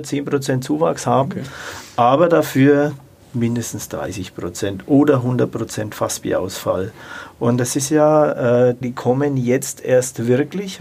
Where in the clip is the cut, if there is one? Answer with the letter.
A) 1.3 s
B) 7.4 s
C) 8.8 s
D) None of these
C